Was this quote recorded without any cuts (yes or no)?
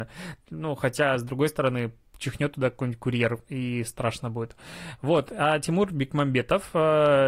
yes